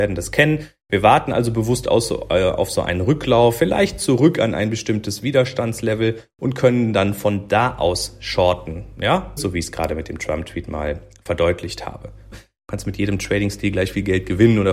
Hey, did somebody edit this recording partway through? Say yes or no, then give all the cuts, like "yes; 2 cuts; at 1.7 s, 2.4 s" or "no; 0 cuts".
yes; 2 cuts; at 9.4 s, 12.3 s